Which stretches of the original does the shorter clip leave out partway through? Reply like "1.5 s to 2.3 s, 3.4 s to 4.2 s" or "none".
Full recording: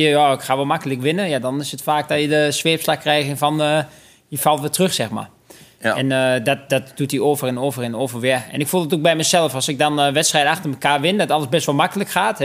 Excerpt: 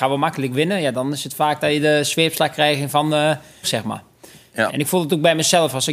4.1 s to 4.9 s, 5.9 s to 8.5 s